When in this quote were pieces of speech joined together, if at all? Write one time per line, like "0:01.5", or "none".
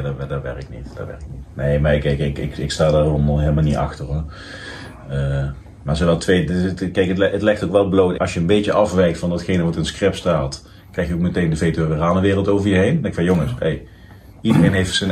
0:08.1